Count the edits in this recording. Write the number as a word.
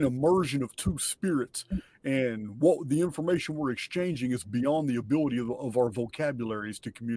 zero